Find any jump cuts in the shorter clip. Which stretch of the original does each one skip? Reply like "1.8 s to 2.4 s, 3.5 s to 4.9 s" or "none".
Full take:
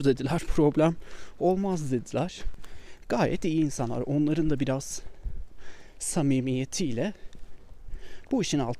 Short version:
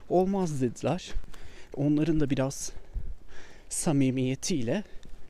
3.0 s to 4.0 s